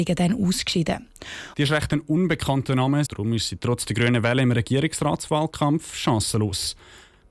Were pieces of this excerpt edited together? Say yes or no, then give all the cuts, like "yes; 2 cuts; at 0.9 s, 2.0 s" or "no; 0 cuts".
yes; 2 cuts; at 1.5 s, 3.1 s